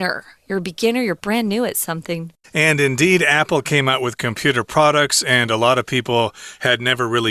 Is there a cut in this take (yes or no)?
yes